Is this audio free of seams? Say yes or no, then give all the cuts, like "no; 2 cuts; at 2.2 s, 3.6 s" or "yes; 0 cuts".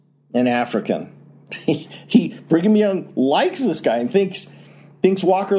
no; 1 cut; at 1.5 s